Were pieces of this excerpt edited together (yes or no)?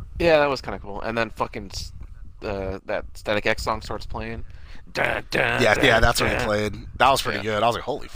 yes